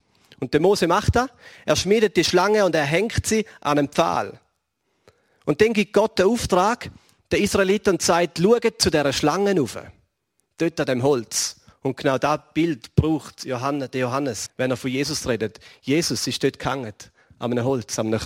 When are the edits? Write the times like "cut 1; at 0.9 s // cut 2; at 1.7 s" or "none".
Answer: cut 1; at 11.7 s // cut 2; at 14.5 s